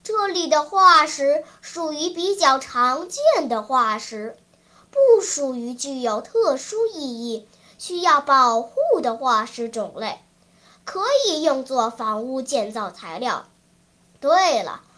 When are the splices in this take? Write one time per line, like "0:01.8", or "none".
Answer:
none

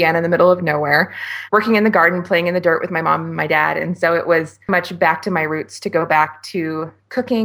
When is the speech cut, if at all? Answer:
0:04.7

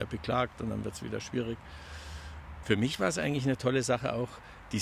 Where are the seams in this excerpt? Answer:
0:02.6

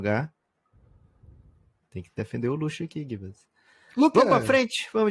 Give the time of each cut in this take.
none

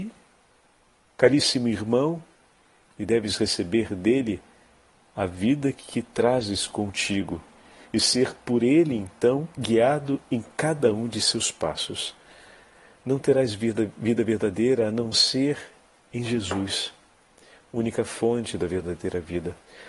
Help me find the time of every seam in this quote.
0:02.9

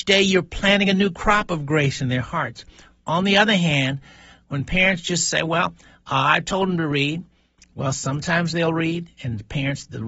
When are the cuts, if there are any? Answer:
none

